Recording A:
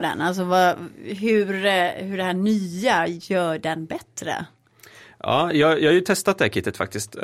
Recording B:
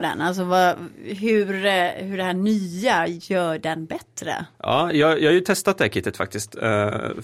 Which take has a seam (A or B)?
B